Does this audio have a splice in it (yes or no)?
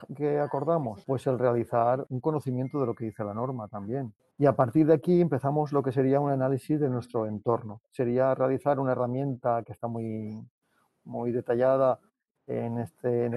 no